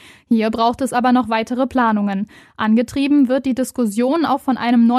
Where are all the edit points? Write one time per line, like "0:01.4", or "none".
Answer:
none